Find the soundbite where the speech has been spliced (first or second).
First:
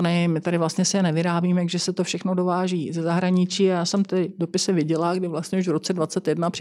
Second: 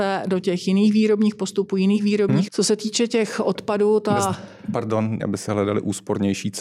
second